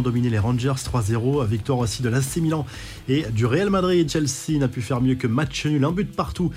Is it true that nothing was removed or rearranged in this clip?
no; 1 cut; at 4.1 s

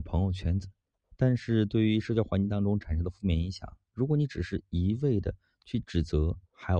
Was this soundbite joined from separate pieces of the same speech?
yes; 1 cut; at 1.0 s

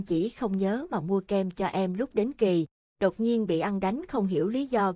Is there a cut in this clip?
no; 0 cuts

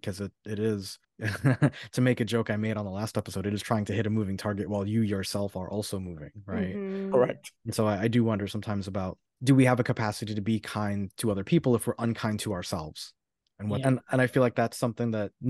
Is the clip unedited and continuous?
no; 2 cuts; at 1.0 s, 13.8 s

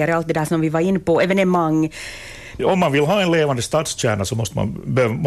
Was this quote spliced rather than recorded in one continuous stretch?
yes; 1 cut; at 2.6 s

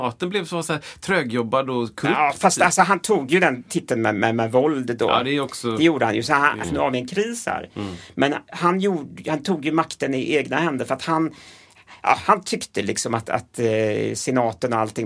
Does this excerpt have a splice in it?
yes; 1 cut; at 6.6 s

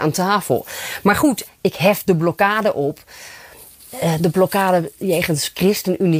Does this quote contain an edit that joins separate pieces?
yes; 1 cut; at 1.5 s

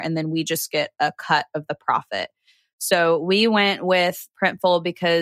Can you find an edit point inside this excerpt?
no; 0 cuts

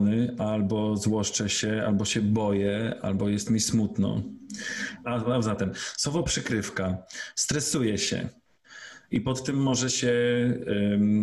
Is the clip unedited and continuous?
no; 1 cut; at 5.0 s

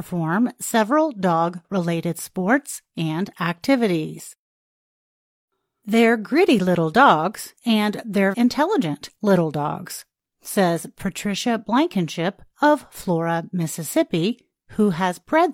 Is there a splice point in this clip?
yes; 1 cut; at 8.3 s

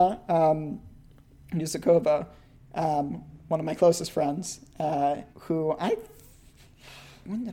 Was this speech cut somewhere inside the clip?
yes; 1 cut; at 5.3 s

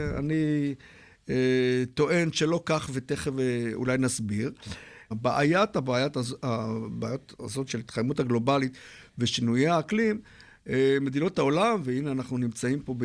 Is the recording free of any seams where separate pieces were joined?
no; 1 cut; at 5.1 s

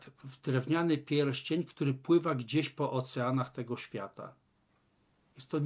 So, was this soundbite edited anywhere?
no; 0 cuts

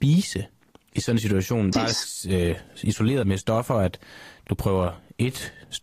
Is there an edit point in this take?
yes; 3 cuts; at 1.7 s, 3.2 s, 4.5 s

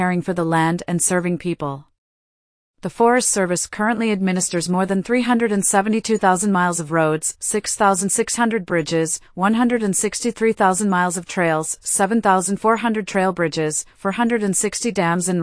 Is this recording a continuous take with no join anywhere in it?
yes; 0 cuts

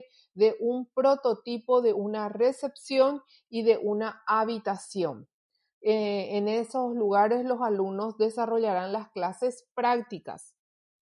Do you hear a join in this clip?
no; 0 cuts

